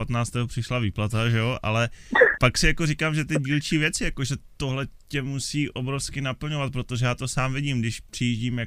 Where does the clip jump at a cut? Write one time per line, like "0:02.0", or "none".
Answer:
0:02.3